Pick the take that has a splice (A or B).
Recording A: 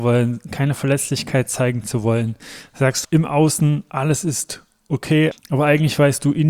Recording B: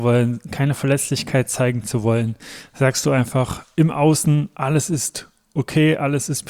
A